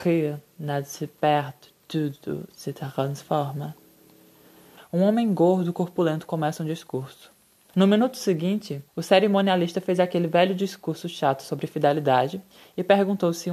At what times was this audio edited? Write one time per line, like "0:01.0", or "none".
0:04.8
0:07.7
0:08.9

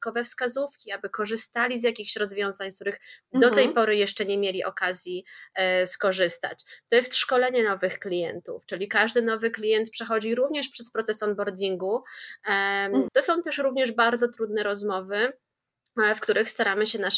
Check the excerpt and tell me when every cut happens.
0:13.1

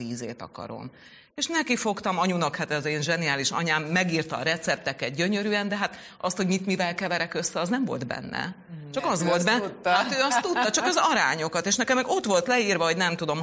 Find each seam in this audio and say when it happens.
none

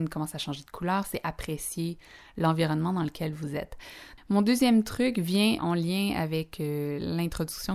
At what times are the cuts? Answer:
0:04.2
0:05.6

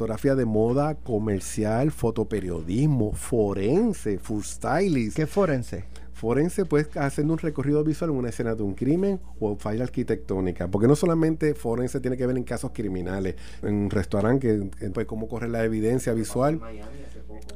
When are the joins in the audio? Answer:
0:13.6
0:14.9

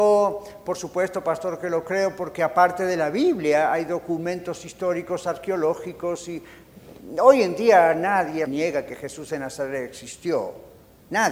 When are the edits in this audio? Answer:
0:08.5

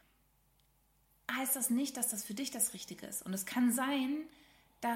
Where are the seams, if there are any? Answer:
none

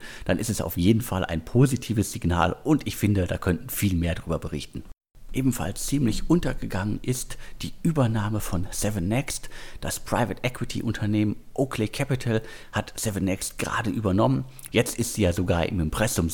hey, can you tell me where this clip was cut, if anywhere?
0:14.7

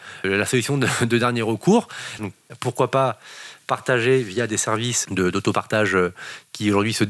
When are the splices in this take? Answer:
0:02.2
0:05.1

